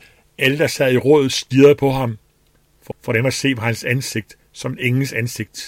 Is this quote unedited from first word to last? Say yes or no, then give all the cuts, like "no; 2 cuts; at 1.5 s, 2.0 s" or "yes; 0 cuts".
no; 1 cut; at 2.9 s